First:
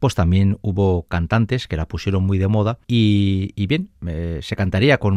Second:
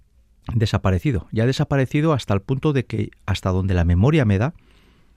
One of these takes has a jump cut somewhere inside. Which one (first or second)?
first